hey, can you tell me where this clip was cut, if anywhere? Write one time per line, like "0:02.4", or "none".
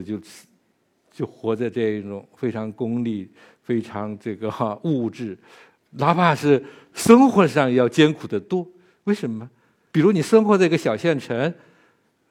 0:05.8
0:09.9